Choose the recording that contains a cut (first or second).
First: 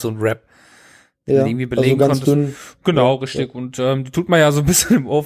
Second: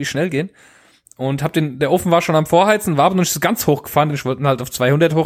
second